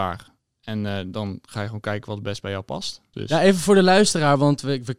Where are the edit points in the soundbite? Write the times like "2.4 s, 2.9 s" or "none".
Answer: 3.1 s